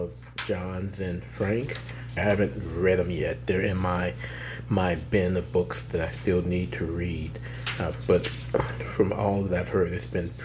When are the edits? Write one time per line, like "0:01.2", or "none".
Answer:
0:02.2